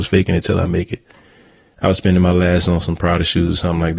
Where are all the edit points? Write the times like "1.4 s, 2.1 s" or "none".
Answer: none